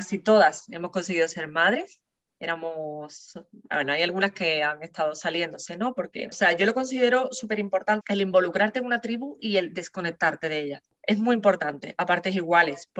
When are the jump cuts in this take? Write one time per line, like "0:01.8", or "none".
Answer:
0:06.3
0:08.0